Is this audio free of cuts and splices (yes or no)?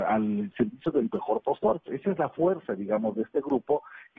no